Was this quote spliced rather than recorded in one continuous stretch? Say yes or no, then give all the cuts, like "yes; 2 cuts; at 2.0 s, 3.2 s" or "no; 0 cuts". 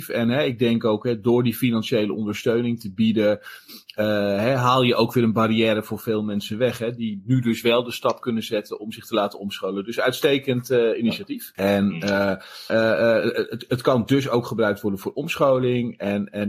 yes; 2 cuts; at 11.5 s, 12.7 s